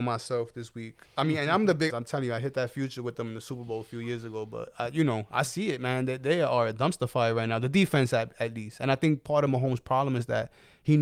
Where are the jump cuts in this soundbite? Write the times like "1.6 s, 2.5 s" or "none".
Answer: 1.9 s